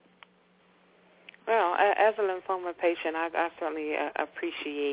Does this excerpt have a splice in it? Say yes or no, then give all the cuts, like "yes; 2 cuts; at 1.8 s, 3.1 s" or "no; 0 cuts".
no; 0 cuts